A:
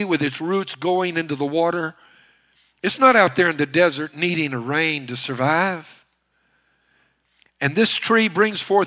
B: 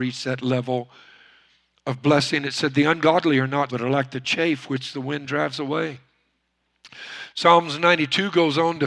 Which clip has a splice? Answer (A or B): B